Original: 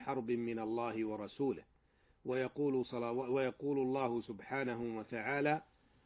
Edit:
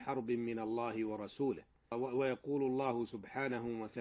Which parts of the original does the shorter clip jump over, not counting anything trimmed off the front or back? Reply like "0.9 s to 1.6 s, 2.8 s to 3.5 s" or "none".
1.9 s to 3.1 s

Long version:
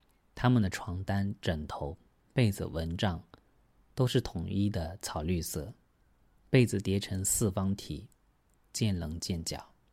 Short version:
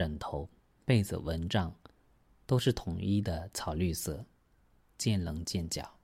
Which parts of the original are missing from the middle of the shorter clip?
6.3 s to 8.6 s

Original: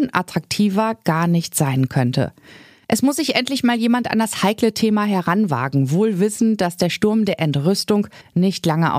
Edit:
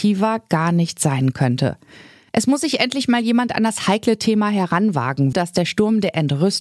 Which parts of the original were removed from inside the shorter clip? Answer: 5.9 s to 6.6 s

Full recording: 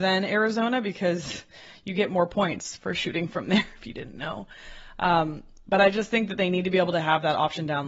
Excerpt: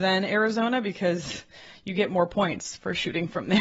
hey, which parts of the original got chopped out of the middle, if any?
none

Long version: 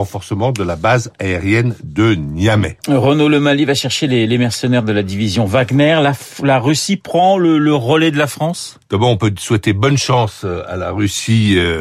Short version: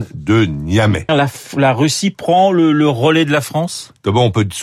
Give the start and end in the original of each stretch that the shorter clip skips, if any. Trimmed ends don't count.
2.8 s to 5.9 s

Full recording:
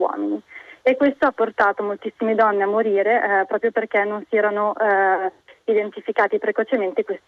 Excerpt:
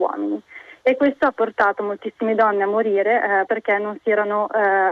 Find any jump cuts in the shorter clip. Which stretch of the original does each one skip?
3.5 s to 3.7 s

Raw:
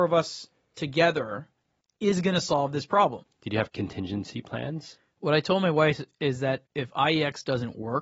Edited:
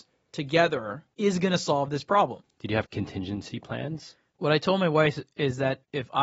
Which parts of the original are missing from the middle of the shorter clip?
1.5 s to 1.9 s

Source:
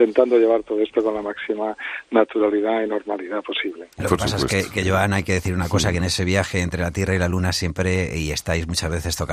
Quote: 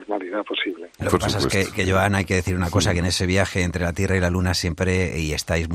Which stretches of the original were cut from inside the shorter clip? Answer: none

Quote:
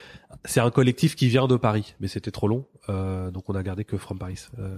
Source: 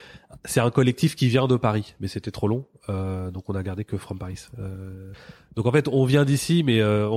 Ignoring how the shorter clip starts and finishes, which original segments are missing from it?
none

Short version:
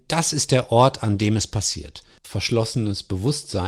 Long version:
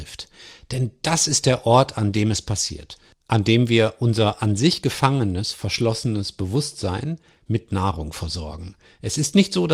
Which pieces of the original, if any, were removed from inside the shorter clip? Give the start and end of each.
3.2 s to 5.5 s

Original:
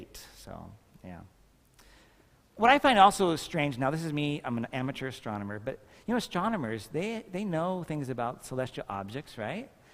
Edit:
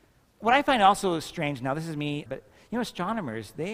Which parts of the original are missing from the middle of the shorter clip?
4.4 s to 5.6 s

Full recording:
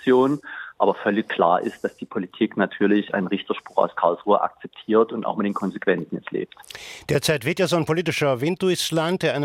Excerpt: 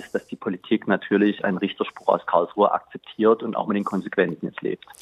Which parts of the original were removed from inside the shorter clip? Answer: none

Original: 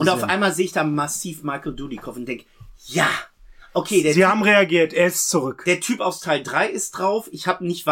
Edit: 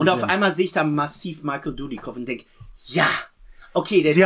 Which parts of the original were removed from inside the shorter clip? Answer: none

